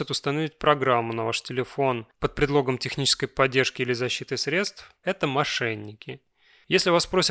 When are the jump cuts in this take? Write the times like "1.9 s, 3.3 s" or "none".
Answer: 5.0 s